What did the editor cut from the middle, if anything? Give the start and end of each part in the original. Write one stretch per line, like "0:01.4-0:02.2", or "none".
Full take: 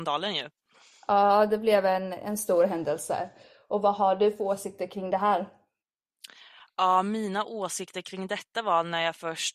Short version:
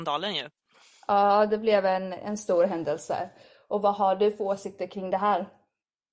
none